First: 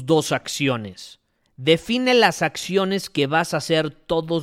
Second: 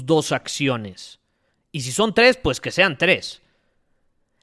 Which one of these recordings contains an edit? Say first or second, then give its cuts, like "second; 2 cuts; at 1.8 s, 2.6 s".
first; 1 cut; at 1.4 s